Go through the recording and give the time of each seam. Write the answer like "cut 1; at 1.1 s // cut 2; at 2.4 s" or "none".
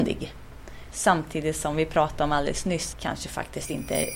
cut 1; at 0.9 s // cut 2; at 2.9 s